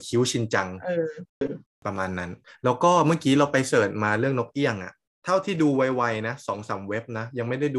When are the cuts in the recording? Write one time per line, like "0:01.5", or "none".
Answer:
0:01.4